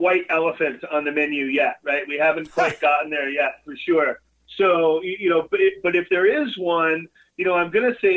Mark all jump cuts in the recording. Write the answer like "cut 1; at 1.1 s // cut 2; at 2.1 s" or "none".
none